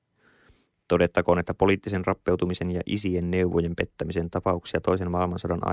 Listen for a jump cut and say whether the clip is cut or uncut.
uncut